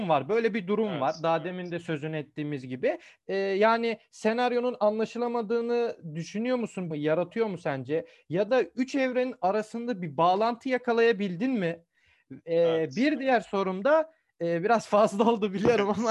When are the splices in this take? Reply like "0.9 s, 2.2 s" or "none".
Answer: 3.2 s, 6.9 s